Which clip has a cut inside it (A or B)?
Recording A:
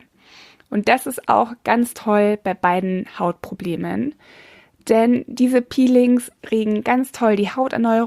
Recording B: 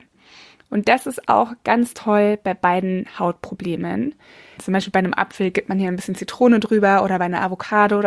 B